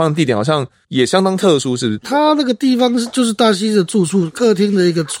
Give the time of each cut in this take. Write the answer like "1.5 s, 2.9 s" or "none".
none